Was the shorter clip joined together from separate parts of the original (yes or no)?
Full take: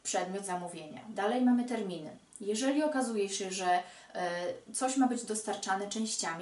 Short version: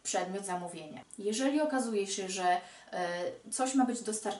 yes